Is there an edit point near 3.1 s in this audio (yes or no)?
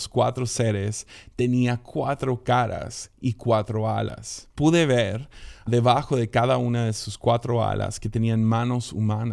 no